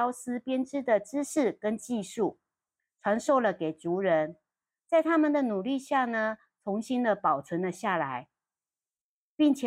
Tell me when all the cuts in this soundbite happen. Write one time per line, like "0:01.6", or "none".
none